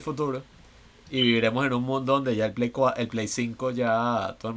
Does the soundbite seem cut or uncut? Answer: uncut